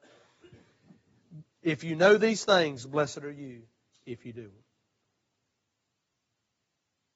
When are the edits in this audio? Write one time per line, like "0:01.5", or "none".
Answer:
0:01.4